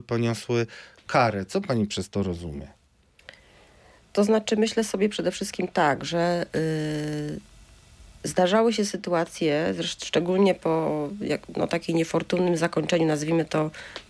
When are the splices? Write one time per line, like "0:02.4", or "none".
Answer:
none